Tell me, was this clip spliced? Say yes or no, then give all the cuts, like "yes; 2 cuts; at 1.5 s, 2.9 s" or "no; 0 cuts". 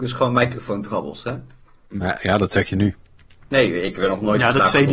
no; 0 cuts